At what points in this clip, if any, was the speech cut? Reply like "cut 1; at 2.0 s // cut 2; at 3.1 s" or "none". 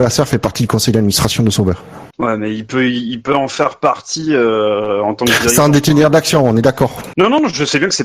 cut 1; at 2.1 s // cut 2; at 7.1 s